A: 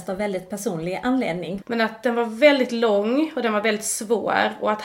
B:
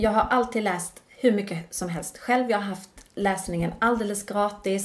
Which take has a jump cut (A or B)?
A